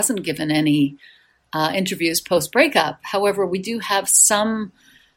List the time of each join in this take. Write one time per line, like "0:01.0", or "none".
none

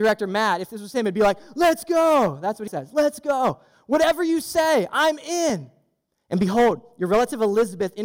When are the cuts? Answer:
0:02.7
0:06.2

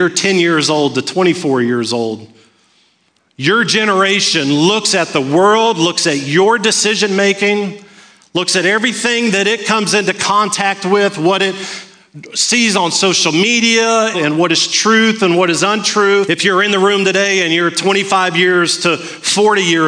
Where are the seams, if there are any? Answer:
0:14.1
0:16.2

